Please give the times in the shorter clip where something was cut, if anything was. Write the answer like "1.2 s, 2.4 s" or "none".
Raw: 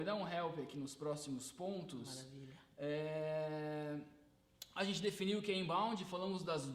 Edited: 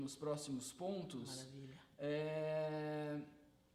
none